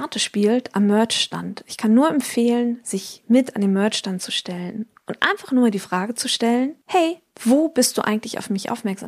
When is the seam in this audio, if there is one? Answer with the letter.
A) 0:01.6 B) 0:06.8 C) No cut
B